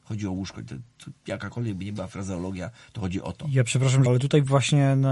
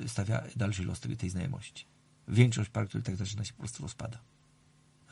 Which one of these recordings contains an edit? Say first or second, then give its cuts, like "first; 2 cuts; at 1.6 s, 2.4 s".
first; 1 cut; at 4.1 s